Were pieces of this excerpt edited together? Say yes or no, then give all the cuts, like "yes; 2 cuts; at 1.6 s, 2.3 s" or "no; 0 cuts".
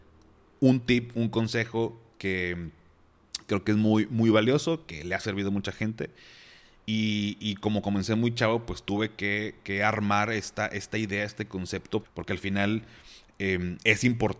yes; 1 cut; at 12.0 s